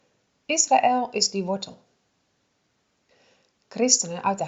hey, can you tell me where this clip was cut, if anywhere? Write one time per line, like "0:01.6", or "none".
none